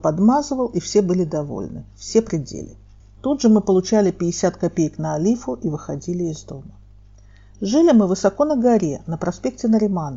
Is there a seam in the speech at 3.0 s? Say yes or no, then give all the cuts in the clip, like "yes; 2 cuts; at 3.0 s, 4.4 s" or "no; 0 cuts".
yes; 1 cut; at 3.0 s